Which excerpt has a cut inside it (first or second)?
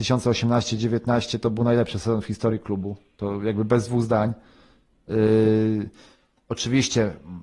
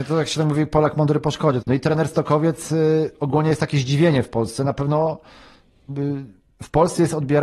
second